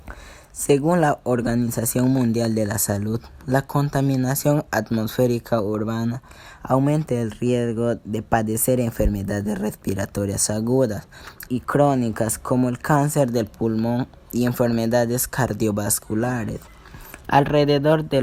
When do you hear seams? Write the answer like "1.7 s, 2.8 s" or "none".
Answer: 11.5 s, 17.2 s